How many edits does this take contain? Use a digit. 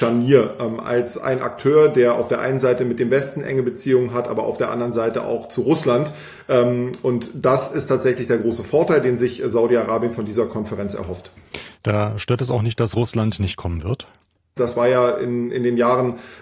1